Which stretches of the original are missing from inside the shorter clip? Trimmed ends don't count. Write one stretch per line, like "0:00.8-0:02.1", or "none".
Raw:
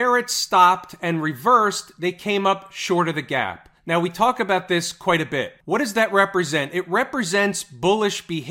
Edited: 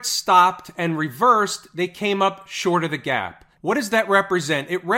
0:03.8-0:05.6

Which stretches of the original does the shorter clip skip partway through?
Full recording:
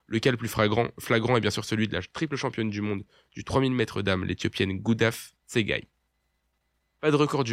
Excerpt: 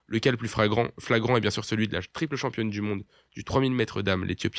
none

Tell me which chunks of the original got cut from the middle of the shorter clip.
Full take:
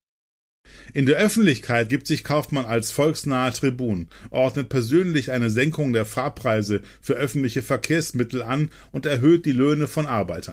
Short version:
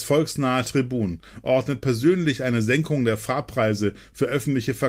none

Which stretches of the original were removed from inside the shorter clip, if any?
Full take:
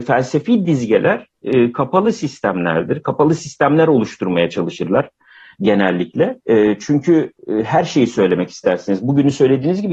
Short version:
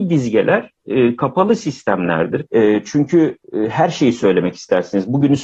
0:03.0-0:06.4

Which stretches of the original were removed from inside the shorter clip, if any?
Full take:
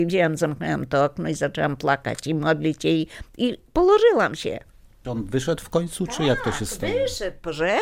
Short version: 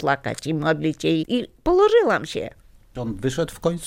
0:03.0-0:03.3

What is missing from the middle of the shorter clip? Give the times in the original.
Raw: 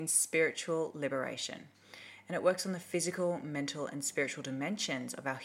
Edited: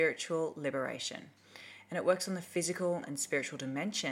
0:03.4-0:03.9

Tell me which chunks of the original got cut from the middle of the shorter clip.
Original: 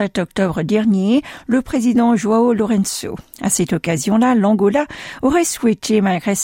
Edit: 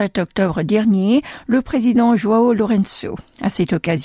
none

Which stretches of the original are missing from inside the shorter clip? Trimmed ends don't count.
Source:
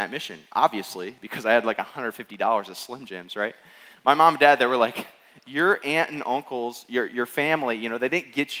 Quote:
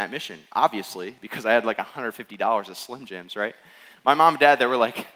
none

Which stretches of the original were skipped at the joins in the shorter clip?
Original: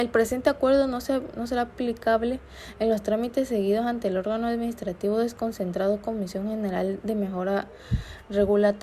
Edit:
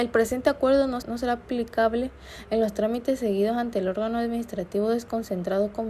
0:01.0-0:01.3

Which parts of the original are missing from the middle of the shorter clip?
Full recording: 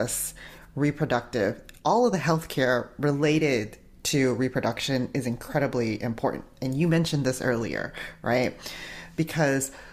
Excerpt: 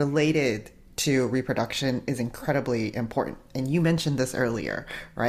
none

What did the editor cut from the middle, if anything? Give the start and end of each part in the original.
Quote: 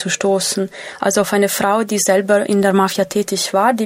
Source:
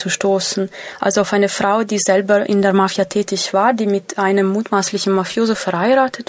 none

